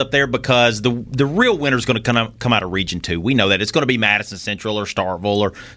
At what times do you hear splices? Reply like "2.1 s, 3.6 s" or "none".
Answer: none